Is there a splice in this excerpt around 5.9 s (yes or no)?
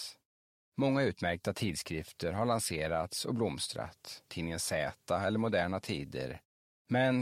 no